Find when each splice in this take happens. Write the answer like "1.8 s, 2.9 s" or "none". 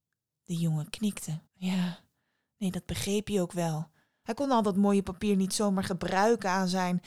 1.5 s, 4.2 s